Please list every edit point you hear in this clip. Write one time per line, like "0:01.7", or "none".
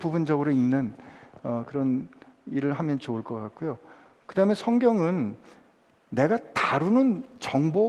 none